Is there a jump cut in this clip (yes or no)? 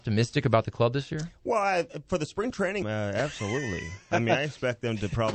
yes